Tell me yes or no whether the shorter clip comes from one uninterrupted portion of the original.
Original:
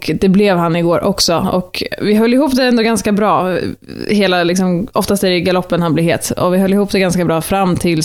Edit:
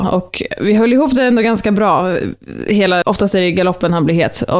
no